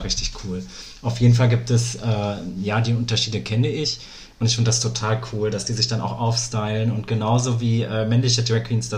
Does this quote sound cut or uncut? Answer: cut